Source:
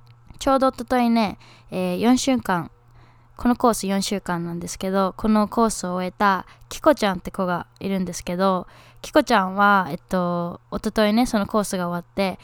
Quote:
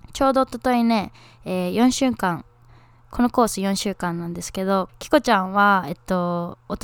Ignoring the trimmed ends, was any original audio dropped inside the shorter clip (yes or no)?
yes